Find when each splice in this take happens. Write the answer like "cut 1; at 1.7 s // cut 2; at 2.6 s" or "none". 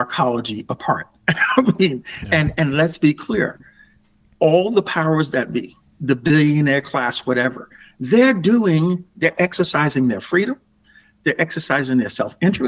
none